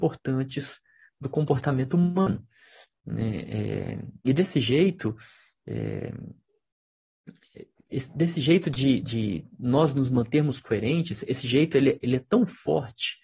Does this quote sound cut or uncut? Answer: uncut